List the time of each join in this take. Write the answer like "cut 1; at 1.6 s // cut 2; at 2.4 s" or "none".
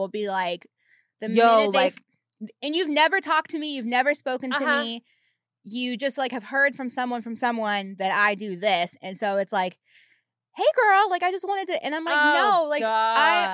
none